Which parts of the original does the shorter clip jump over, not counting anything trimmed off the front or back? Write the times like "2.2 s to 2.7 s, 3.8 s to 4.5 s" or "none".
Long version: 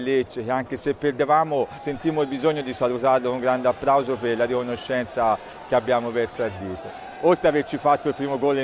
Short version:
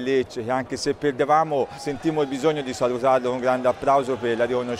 none